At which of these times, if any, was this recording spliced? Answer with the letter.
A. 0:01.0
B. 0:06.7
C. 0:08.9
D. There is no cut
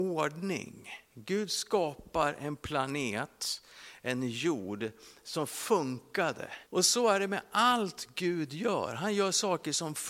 B